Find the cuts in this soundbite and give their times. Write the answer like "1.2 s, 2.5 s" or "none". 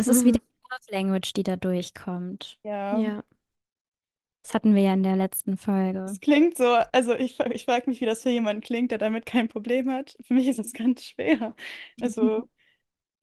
none